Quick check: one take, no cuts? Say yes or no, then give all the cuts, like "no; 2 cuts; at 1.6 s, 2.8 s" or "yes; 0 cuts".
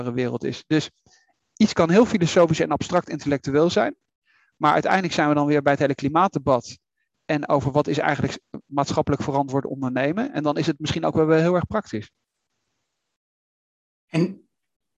yes; 0 cuts